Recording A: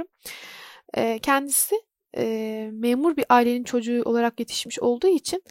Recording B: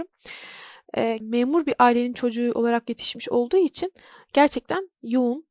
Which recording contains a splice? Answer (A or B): B